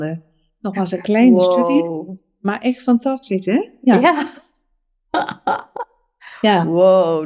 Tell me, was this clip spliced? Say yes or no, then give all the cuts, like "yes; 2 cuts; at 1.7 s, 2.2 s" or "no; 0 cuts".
no; 0 cuts